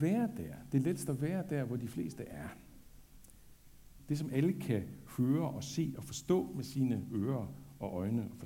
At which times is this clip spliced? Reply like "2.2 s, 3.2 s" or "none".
4.0 s

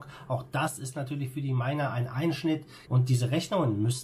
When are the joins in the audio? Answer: 2.9 s

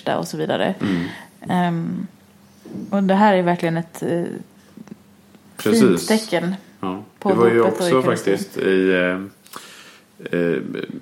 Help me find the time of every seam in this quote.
none

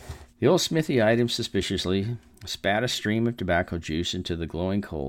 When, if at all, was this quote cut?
none

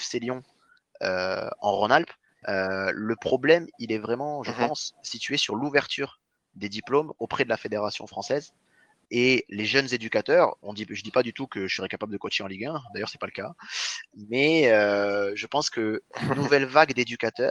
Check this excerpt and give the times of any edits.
2.4 s, 9.1 s

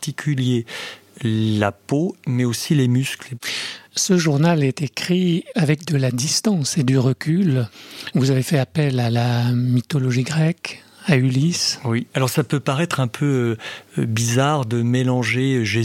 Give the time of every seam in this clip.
none

